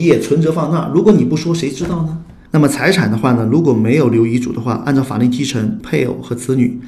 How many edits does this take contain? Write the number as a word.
two